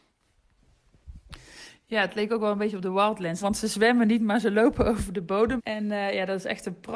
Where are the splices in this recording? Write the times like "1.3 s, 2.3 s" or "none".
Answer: 3.4 s, 5.6 s